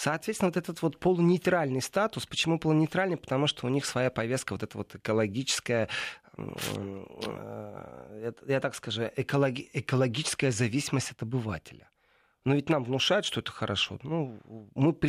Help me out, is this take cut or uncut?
uncut